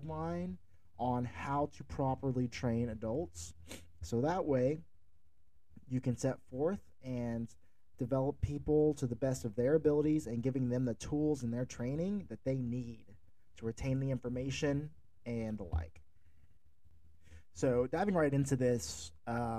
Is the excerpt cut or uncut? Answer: cut